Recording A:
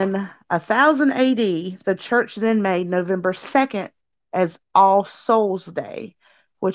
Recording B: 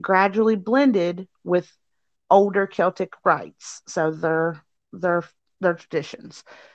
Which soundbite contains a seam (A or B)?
B